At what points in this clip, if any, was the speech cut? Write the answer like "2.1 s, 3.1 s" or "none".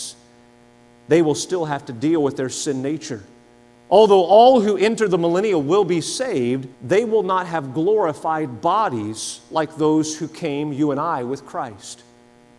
3.7 s, 6.7 s